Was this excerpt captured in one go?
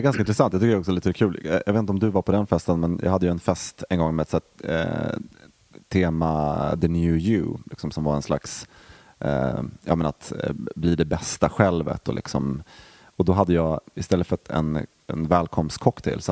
yes; 0 cuts

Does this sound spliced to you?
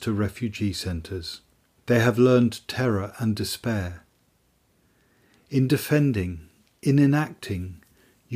yes; 1 cut; at 1.8 s

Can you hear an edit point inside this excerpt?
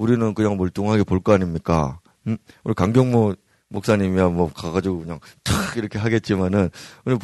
no; 0 cuts

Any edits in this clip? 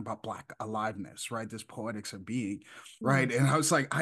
yes; 1 cut; at 3.0 s

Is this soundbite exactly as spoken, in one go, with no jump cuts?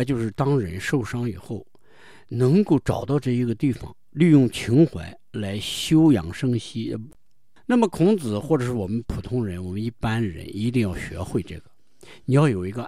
yes; 0 cuts

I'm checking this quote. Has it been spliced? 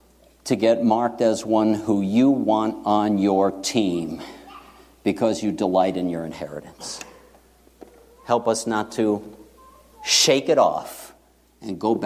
no; 0 cuts

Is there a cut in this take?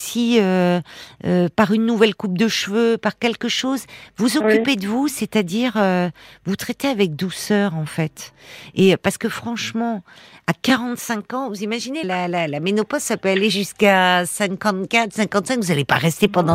yes; 1 cut; at 12.0 s

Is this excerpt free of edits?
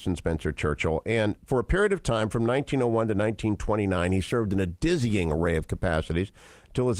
yes; 0 cuts

